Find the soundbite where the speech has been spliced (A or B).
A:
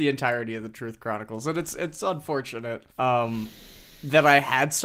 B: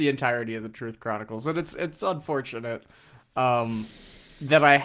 A